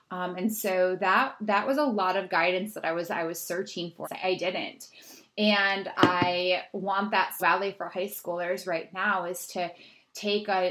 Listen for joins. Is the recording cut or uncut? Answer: cut